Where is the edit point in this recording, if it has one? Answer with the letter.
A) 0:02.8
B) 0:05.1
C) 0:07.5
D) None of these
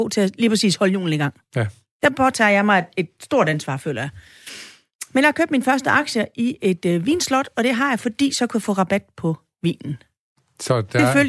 D